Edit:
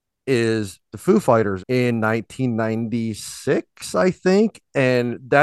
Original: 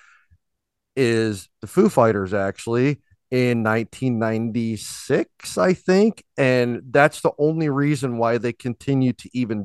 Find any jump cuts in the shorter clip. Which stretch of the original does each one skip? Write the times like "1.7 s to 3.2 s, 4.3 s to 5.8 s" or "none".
2.3 s to 3.2 s